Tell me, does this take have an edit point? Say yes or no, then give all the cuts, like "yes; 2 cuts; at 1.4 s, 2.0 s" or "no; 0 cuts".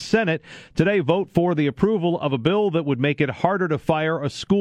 no; 0 cuts